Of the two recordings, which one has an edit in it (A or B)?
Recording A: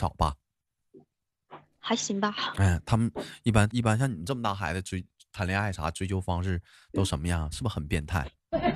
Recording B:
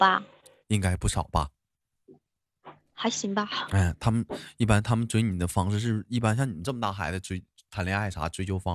A